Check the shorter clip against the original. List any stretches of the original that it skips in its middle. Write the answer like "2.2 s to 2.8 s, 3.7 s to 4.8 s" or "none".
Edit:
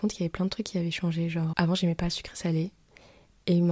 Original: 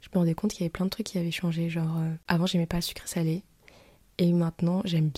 1.9 s to 2.2 s